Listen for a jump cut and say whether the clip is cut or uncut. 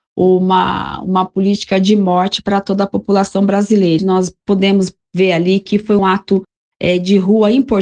cut